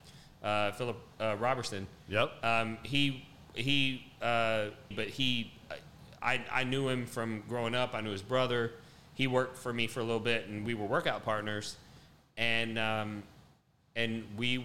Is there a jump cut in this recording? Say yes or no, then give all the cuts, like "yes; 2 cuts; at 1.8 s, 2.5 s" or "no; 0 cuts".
yes; 1 cut; at 4.9 s